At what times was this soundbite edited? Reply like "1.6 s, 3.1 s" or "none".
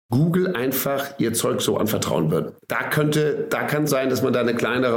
2.6 s, 3.9 s